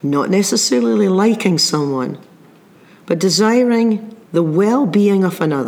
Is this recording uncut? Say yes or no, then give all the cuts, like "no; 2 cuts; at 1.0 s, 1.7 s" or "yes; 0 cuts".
no; 1 cut; at 4.2 s